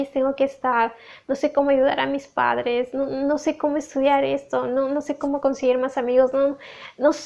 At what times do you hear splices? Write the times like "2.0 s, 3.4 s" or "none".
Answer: none